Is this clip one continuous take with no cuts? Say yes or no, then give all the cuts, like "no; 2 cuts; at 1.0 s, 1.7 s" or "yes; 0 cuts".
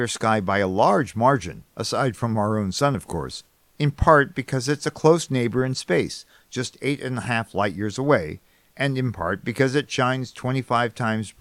yes; 0 cuts